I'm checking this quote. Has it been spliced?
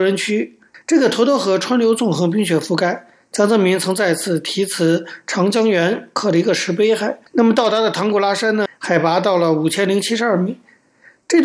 yes; 2 cuts; at 7.3 s, 8.7 s

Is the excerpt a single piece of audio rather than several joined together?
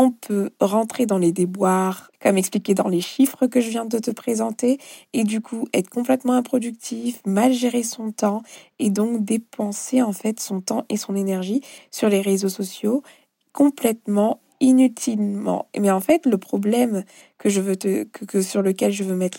no; 1 cut; at 2.1 s

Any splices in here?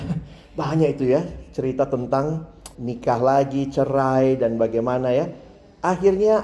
yes; 1 cut; at 2.7 s

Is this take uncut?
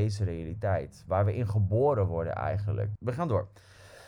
no; 1 cut; at 3.0 s

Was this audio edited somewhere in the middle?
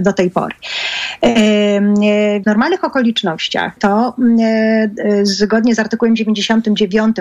yes; 2 cuts; at 2.4 s, 3.8 s

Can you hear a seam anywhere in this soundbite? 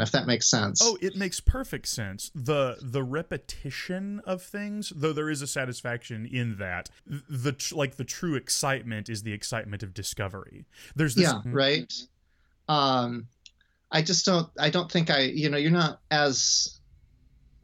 yes; 2 cuts; at 7.0 s, 11.5 s

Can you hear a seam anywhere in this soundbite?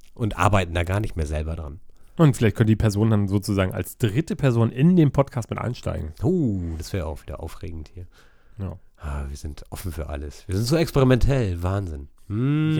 no; 0 cuts

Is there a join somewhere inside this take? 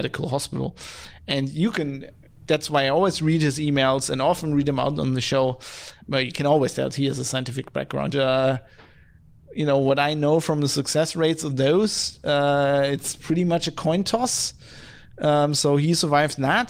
yes; 2 cuts; at 6.0 s, 8.1 s

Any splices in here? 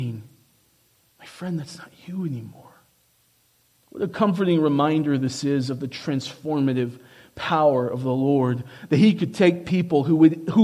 yes; 1 cut; at 3.7 s

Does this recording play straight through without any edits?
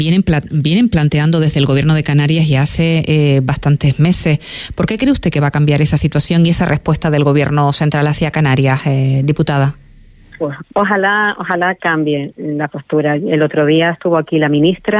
yes; 0 cuts

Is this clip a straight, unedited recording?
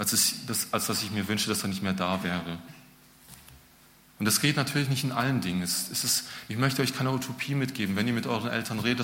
no; 1 cut; at 4.0 s

